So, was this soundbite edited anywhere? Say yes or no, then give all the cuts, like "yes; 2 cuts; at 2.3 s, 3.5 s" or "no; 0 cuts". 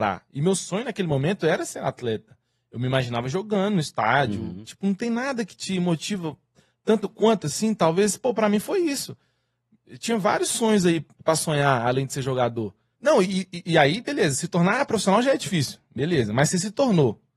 yes; 2 cuts; at 4.6 s, 12.9 s